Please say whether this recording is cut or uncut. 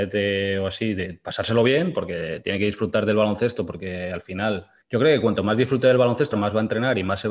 cut